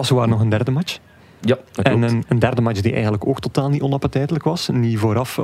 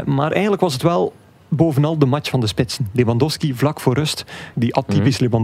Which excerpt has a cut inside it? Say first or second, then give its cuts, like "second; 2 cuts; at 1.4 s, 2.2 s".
second; 1 cut; at 4.5 s